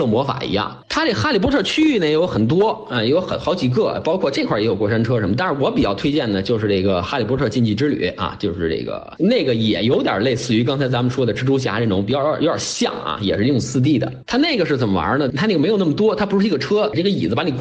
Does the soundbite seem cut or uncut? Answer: uncut